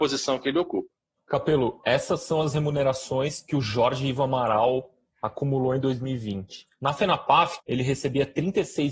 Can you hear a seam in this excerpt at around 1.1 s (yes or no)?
no